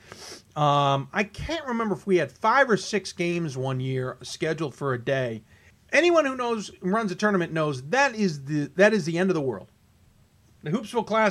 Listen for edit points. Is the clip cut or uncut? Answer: cut